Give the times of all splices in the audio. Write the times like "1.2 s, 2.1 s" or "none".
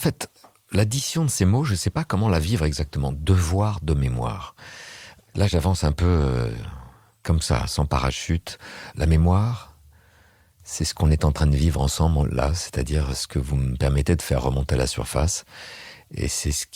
none